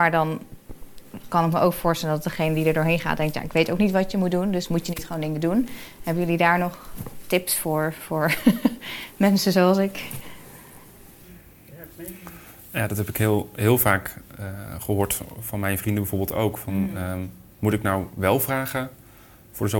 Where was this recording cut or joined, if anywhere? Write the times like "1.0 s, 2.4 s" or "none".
none